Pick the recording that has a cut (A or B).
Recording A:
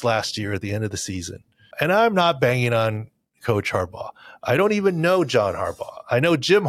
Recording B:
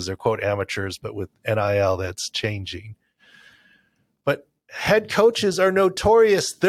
A